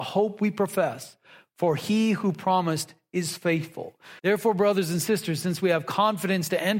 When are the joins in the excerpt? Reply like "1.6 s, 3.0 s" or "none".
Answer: 4.2 s